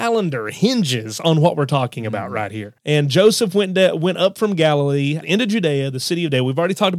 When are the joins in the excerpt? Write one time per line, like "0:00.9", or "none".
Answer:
0:02.8
0:05.2